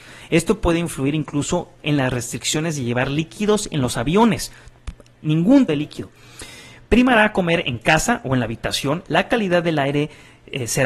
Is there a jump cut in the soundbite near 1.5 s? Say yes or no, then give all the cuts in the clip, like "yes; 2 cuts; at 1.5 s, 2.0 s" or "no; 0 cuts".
no; 2 cuts; at 5.7 s, 9.0 s